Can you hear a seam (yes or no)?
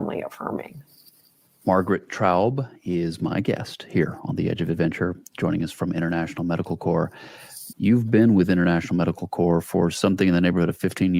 yes